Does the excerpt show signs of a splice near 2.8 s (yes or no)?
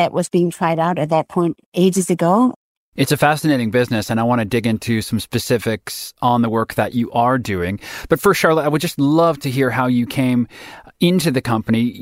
yes